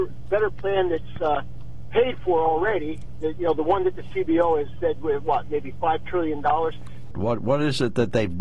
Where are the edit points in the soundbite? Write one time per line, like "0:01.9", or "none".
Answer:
0:07.1